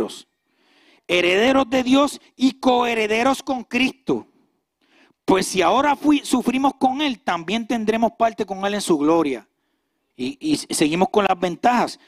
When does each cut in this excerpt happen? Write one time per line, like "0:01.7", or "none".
0:10.1